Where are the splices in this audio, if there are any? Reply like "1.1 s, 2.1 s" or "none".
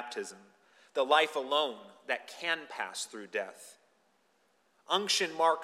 none